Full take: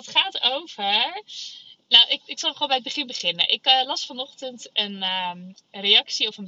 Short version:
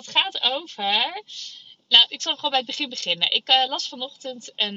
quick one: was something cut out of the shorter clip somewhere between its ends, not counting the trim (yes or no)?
yes